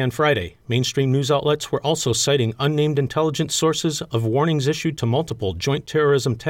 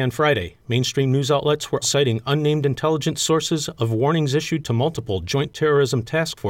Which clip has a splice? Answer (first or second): second